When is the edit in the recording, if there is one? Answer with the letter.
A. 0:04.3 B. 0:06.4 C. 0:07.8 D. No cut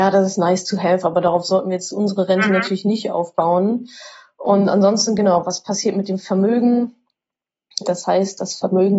C